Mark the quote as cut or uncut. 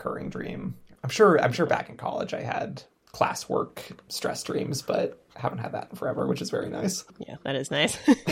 cut